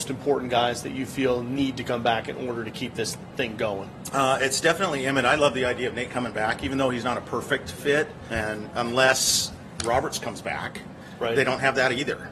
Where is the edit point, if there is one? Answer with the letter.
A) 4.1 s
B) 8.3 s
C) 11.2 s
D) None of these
B